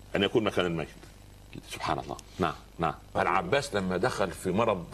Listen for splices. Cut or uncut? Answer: cut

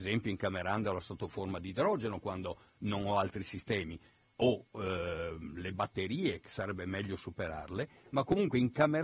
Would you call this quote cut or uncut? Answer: uncut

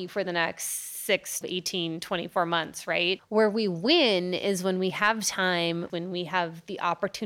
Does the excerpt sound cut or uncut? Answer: cut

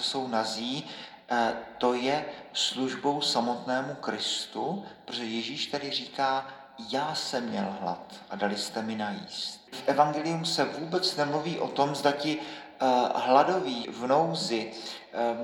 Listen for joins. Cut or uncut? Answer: cut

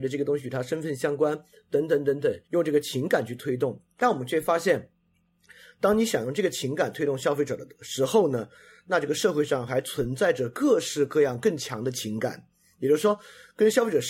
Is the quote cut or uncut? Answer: cut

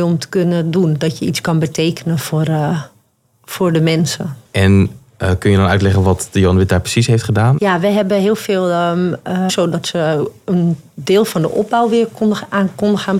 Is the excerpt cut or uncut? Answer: cut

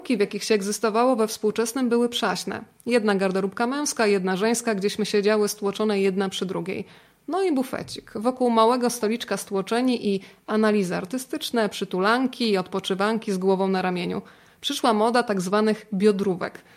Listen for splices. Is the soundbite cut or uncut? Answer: uncut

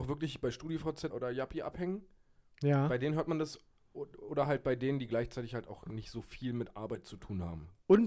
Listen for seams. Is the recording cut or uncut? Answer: cut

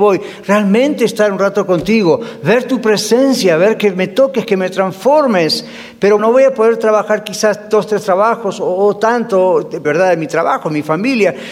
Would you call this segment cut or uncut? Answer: cut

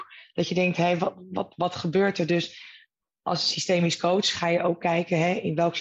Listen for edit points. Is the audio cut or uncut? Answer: uncut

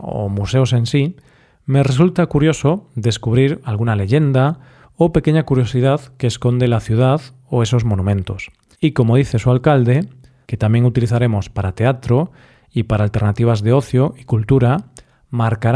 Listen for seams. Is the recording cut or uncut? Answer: cut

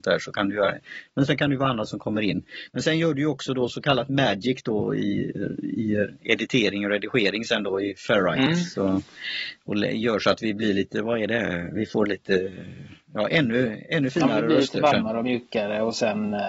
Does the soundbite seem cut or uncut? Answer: uncut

